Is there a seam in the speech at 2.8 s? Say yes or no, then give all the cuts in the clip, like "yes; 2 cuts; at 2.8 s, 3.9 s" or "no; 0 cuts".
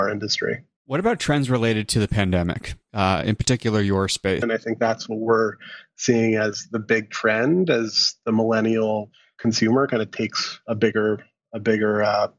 no; 1 cut; at 4.4 s